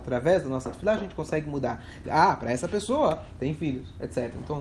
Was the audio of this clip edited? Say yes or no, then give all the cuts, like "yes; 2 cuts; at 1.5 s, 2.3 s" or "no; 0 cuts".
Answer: yes; 1 cut; at 2.0 s